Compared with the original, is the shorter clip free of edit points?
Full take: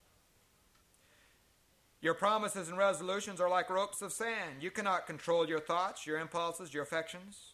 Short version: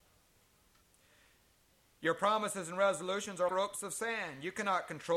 no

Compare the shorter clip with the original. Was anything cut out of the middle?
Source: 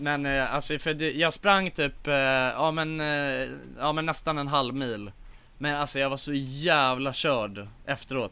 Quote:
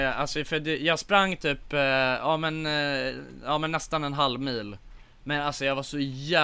no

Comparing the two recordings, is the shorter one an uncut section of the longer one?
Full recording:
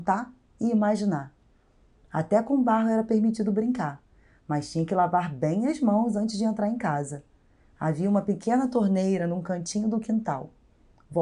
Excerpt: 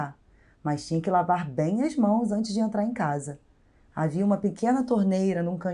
yes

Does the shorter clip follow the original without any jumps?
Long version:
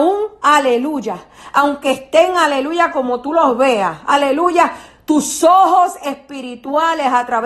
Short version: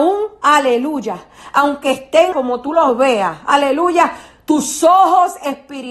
no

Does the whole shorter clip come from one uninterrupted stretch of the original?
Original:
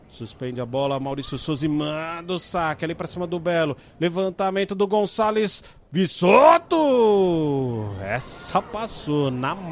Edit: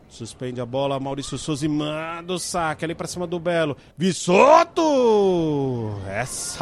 no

